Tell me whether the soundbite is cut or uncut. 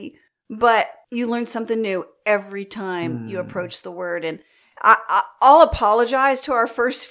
uncut